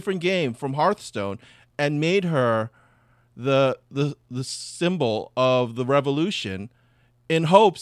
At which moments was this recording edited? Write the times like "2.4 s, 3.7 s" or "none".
none